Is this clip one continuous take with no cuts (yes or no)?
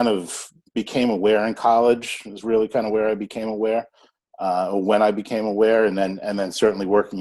yes